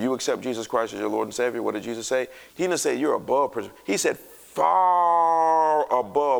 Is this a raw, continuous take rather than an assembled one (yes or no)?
no